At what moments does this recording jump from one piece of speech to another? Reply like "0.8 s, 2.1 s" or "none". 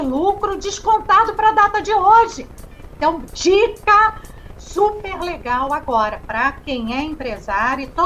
3.0 s